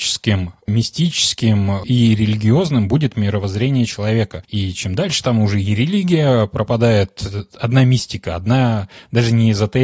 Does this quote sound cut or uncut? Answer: uncut